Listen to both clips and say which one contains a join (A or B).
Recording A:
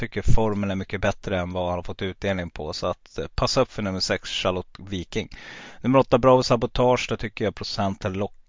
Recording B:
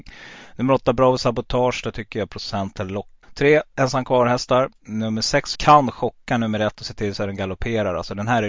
B